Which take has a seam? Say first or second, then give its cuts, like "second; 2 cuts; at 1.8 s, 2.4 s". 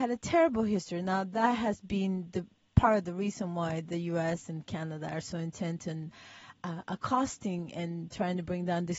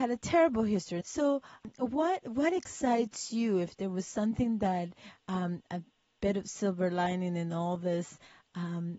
second; 1 cut; at 1.0 s